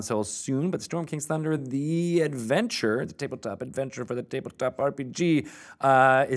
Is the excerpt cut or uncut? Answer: uncut